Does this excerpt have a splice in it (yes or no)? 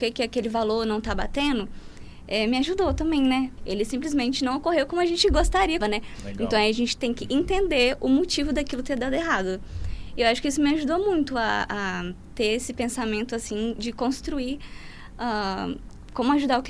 yes